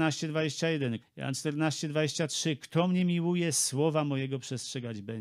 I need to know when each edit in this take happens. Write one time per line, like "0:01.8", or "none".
0:01.0